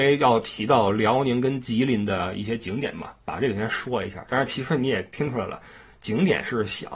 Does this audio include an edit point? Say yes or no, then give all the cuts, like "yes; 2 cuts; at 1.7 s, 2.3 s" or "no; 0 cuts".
no; 0 cuts